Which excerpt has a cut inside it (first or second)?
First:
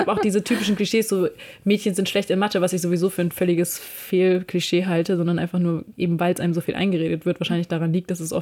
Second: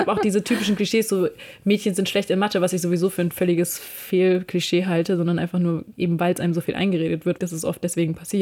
second